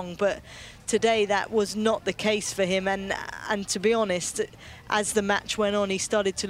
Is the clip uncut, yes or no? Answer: yes